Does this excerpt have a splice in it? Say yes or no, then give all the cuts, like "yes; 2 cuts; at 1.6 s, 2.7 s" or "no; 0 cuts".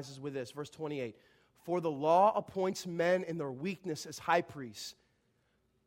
no; 0 cuts